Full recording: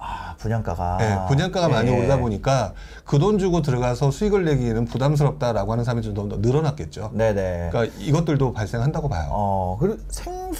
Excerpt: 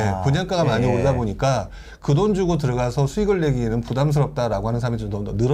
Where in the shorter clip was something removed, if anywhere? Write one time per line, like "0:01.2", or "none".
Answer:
none